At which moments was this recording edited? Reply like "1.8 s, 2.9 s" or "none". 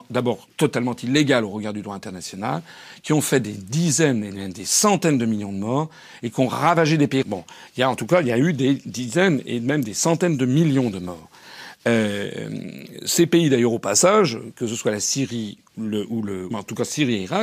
7.2 s, 16.5 s